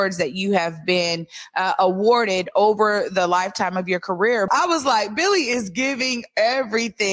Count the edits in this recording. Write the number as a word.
one